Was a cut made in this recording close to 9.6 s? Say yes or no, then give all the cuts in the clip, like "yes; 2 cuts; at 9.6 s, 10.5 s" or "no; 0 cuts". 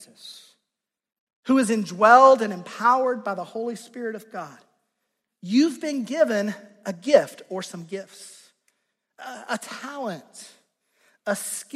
no; 0 cuts